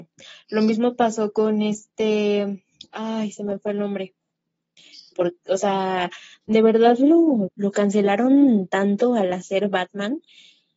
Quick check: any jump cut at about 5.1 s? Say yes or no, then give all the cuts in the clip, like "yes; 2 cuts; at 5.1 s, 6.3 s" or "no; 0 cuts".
yes; 2 cuts; at 5.1 s, 7.5 s